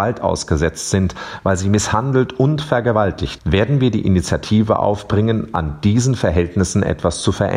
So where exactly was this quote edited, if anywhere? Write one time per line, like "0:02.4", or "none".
0:03.4